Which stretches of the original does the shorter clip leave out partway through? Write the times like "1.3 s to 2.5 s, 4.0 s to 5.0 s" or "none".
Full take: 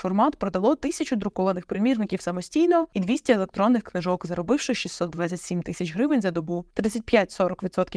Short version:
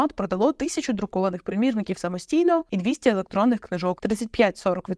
4.2 s to 6.7 s